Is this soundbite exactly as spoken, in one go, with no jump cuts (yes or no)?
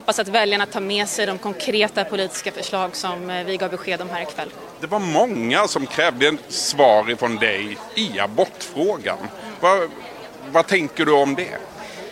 yes